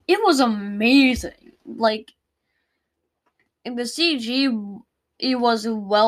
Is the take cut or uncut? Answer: uncut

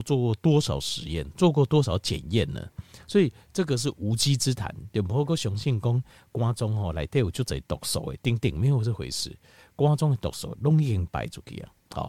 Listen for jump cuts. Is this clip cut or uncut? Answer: uncut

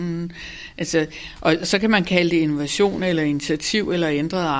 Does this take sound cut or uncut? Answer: uncut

